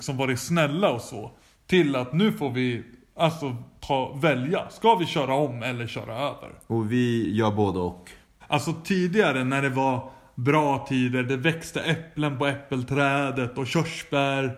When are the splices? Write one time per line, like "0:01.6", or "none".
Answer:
0:08.4